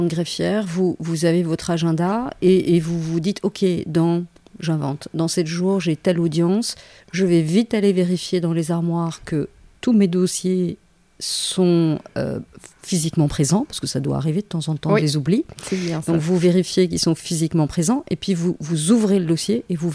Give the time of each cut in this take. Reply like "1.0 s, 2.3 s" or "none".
none